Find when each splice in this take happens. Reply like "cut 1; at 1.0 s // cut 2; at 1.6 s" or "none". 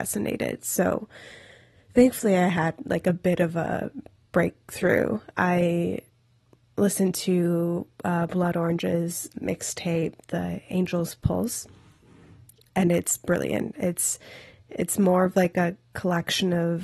cut 1; at 5.3 s // cut 2; at 9.3 s